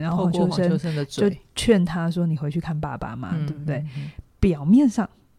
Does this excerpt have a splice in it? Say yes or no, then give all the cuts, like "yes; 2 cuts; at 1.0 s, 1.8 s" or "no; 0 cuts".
no; 0 cuts